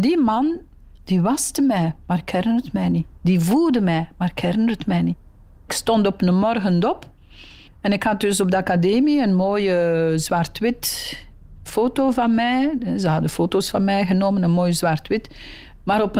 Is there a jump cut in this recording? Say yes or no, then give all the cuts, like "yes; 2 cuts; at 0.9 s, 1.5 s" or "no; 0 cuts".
yes; 1 cut; at 11.7 s